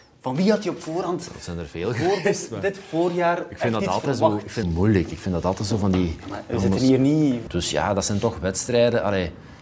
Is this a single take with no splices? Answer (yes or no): no